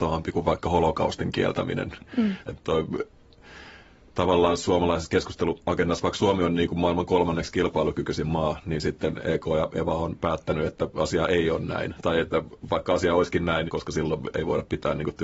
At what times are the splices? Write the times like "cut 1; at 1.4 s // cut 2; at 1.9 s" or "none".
cut 1; at 2.4 s // cut 2; at 13.7 s